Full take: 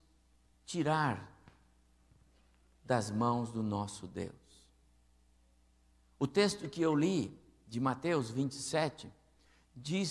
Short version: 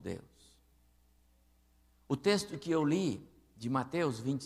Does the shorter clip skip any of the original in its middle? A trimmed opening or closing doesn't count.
no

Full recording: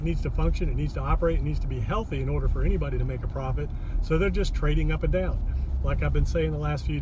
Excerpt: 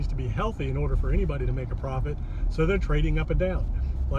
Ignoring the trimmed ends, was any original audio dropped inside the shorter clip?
yes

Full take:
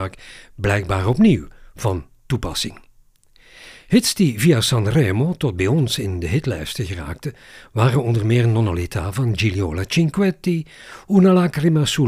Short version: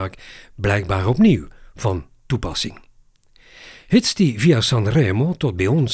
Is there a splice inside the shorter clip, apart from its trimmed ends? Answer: no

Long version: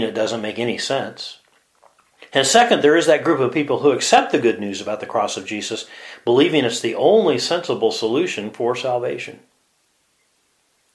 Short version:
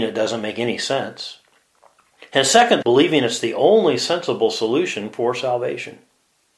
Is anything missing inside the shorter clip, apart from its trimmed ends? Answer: yes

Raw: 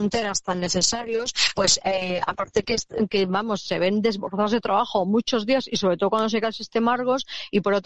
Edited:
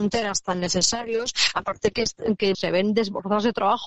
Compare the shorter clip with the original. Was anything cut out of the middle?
yes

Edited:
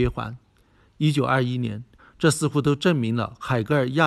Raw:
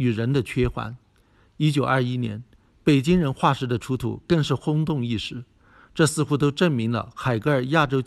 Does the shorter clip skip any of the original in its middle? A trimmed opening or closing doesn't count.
yes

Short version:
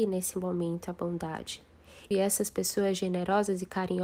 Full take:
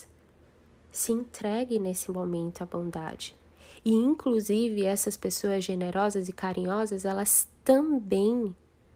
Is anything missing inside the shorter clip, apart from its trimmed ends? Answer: yes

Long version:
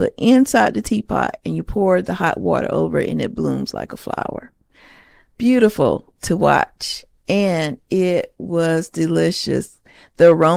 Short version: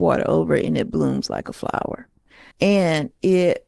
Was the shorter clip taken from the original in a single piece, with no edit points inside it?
no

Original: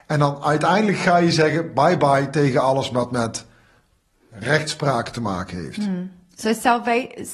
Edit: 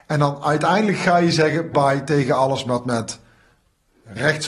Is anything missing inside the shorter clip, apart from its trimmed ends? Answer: yes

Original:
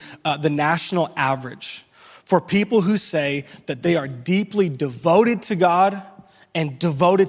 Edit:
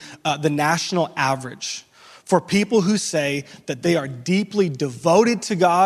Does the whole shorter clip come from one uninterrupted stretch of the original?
yes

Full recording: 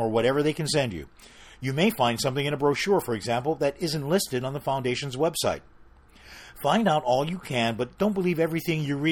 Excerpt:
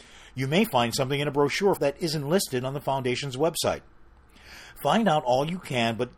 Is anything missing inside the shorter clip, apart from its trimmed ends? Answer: yes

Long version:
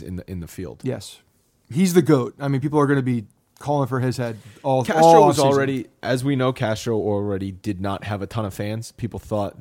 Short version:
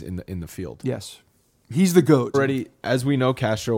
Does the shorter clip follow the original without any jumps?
no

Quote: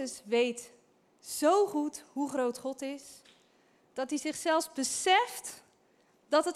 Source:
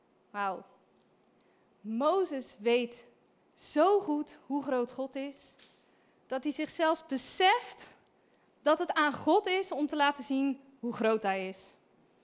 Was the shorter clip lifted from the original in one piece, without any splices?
yes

